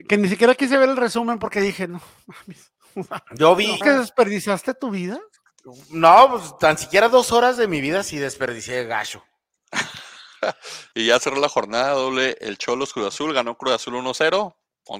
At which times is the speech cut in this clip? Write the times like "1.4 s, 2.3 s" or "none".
3.8 s